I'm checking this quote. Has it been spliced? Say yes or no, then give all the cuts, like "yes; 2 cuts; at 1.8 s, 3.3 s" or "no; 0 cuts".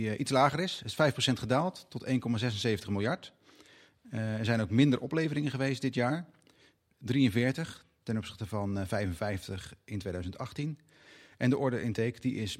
no; 0 cuts